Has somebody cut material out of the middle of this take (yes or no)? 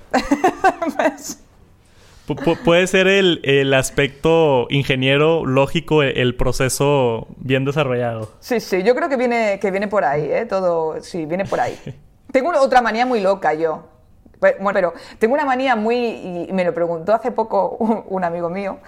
yes